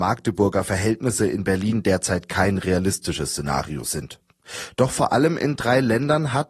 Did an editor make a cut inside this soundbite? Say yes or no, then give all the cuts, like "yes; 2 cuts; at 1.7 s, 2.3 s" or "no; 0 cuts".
no; 0 cuts